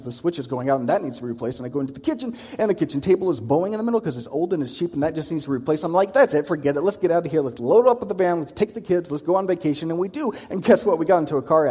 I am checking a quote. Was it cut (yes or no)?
no